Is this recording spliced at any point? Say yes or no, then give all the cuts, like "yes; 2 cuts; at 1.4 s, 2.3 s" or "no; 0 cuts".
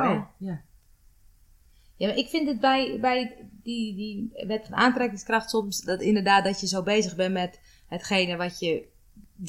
no; 0 cuts